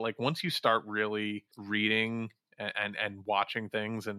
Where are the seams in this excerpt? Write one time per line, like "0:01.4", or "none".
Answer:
0:01.5